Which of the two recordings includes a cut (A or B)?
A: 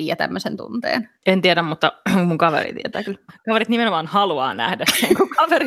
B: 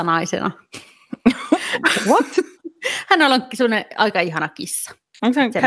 A